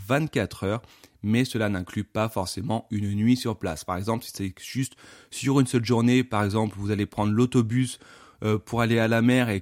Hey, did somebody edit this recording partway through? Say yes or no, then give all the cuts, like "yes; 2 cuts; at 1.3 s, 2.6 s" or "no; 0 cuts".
no; 0 cuts